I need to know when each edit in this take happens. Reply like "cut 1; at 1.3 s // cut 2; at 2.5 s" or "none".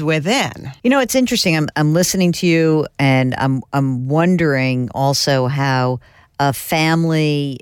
none